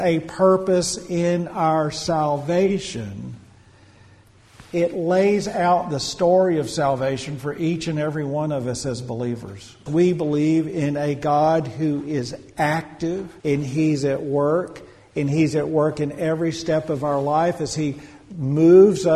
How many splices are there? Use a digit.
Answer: 2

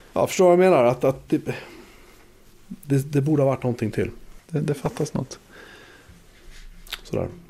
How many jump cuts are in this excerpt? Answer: 2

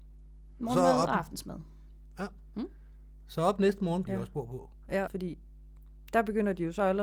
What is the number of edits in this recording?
2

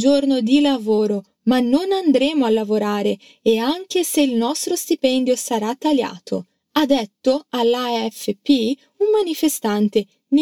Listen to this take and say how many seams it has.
0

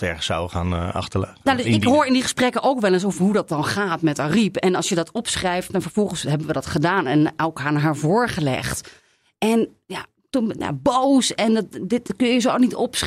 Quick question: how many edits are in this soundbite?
1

